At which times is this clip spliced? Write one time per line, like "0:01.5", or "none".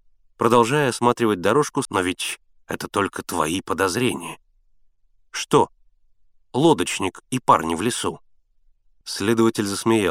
0:01.9
0:09.0